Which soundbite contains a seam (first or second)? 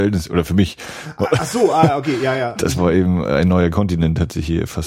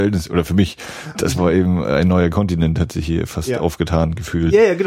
second